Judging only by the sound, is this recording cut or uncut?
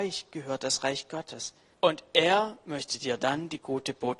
cut